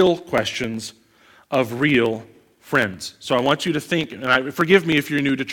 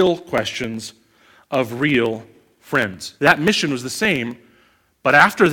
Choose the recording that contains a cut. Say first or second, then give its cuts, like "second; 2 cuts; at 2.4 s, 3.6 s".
second; 1 cut; at 3.2 s